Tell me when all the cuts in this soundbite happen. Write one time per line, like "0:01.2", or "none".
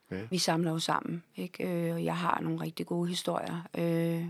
none

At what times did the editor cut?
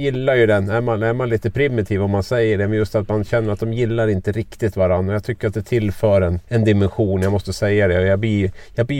0:06.4

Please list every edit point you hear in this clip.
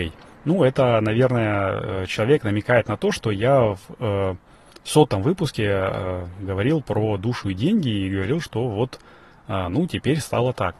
none

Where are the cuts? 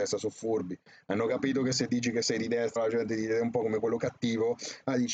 0:02.8

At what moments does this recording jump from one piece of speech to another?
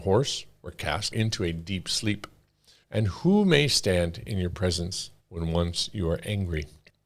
0:02.8
0:05.2

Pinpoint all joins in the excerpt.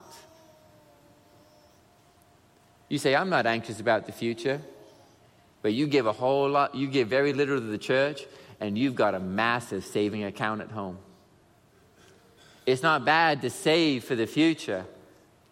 none

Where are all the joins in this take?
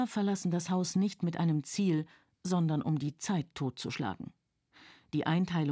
none

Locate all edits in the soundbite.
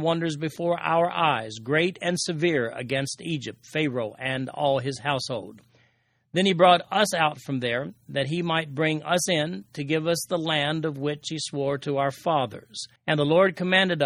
0:13.0

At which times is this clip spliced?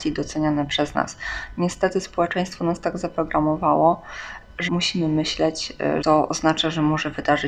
0:04.7
0:06.0

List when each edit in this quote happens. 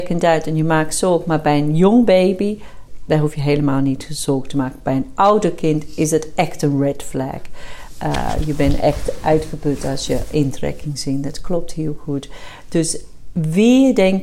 none

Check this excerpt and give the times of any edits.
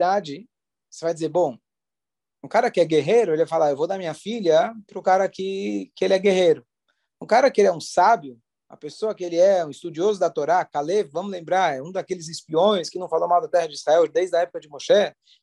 none

